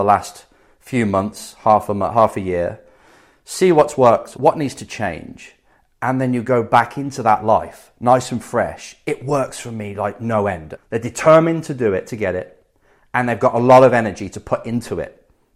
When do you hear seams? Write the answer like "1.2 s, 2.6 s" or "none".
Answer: 4.4 s, 10.8 s